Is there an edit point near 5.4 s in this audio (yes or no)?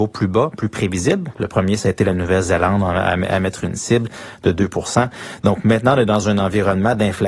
no